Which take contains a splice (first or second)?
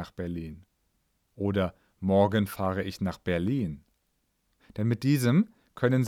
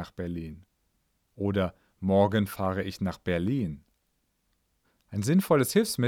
first